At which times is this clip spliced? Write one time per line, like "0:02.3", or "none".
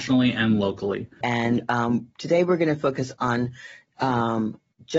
0:01.2